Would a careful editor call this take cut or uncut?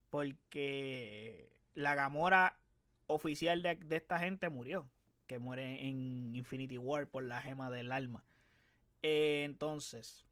uncut